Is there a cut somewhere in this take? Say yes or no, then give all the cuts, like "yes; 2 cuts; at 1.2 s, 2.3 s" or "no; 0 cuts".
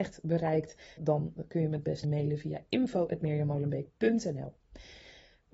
yes; 2 cuts; at 1.0 s, 2.0 s